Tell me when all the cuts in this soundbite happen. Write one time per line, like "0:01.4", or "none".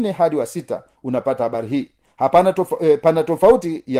none